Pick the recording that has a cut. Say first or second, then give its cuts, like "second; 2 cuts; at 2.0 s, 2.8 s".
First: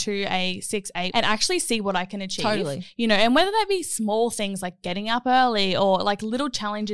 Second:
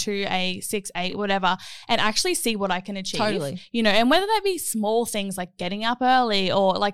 first; 1 cut; at 1.1 s